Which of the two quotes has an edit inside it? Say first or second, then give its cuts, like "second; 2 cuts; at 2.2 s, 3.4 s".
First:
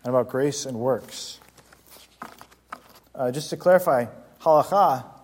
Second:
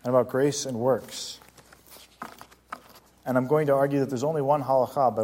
first; 1 cut; at 3.0 s